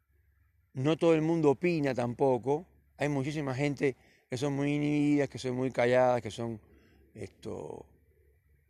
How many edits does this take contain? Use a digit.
0